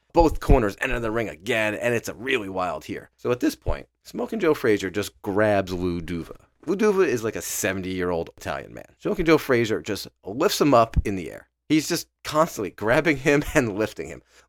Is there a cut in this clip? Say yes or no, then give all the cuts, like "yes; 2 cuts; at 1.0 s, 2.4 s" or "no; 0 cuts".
no; 0 cuts